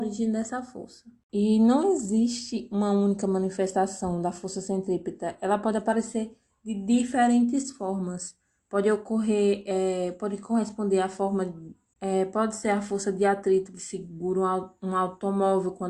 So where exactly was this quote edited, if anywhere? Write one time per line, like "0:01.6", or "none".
0:11.9